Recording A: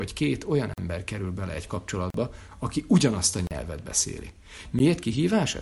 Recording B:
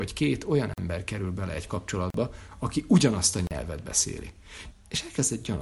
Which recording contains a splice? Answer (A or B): B